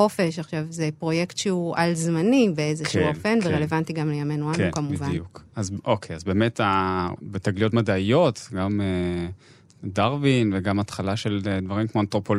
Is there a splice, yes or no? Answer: yes